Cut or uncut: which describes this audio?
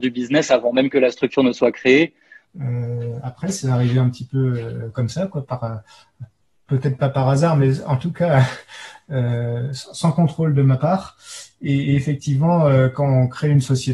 cut